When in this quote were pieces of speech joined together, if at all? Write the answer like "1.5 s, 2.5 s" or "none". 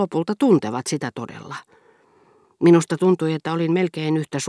2.4 s